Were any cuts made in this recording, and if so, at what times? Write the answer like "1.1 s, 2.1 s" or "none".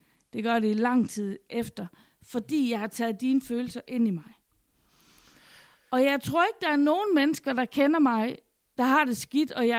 none